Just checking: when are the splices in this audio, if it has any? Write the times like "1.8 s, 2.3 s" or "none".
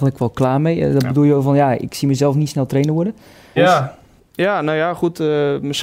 3.6 s